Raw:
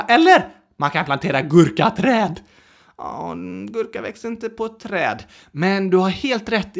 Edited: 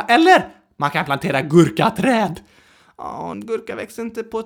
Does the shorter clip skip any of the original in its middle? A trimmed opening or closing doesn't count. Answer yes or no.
yes